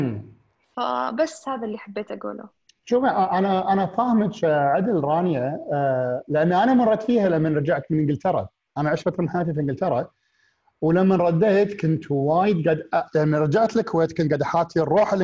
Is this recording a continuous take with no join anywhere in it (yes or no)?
yes